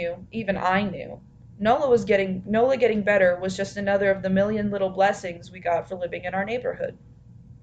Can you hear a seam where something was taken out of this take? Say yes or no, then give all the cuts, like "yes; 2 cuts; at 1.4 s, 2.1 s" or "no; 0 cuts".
no; 0 cuts